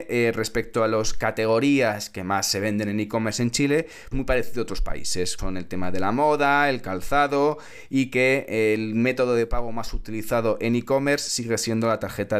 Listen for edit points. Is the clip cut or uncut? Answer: cut